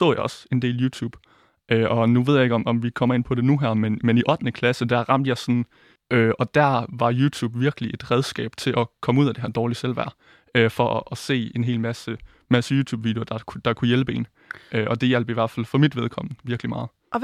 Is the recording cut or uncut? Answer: cut